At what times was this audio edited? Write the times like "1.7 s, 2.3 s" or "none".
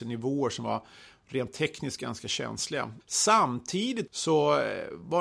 3.0 s, 4.1 s